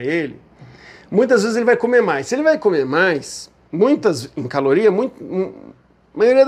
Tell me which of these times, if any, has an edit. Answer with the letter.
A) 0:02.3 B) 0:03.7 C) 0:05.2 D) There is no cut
D